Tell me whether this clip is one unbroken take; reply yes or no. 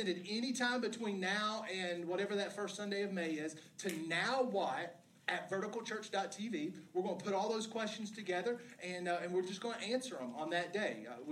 yes